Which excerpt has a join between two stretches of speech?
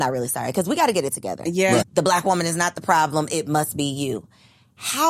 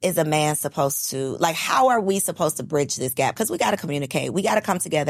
first; 1 cut; at 1.8 s

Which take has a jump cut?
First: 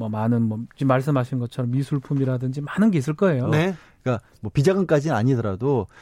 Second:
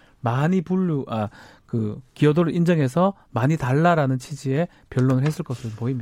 first; 1 cut; at 3.4 s

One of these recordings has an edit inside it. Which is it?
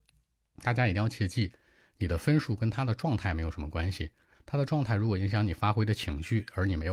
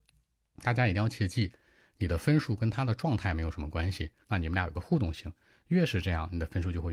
second; 1 cut; at 4.2 s

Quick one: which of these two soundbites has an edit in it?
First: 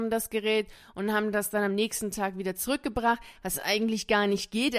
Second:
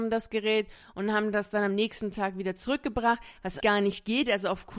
second; 1 cut; at 3.6 s

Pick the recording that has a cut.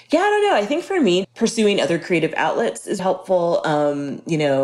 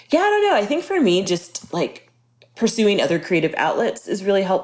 first; 2 cuts; at 1.2 s, 3.0 s

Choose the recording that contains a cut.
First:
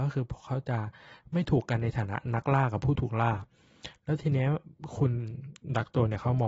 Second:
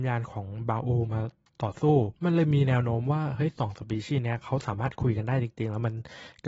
second; 1 cut; at 2.1 s

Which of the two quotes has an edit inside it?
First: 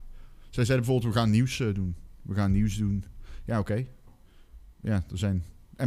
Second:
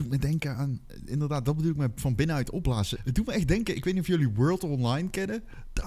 second; 1 cut; at 3.0 s

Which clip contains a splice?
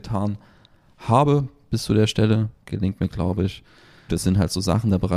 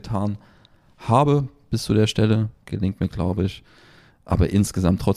first; 1 cut; at 4.1 s

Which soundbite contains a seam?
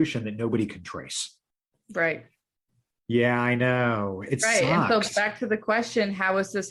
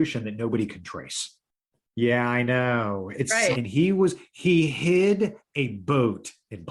second; 2 cuts; at 1.8 s, 3.5 s

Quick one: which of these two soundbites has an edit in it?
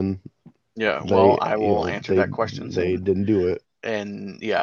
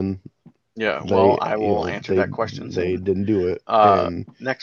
first; 1 cut; at 3.6 s

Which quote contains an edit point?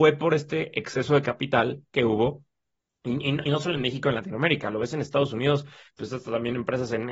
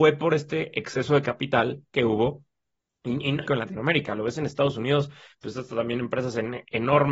second; 1 cut; at 3.5 s

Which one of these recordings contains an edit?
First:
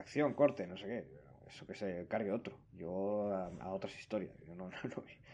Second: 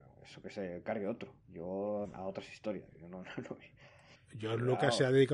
second; 2 cuts; at 2.0 s, 4.1 s

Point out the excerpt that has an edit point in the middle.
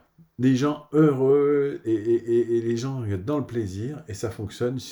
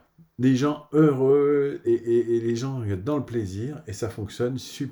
second; 1 cut; at 1.9 s

